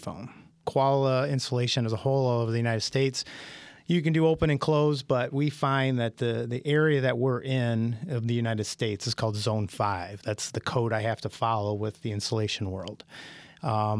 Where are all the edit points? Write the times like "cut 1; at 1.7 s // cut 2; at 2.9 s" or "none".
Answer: none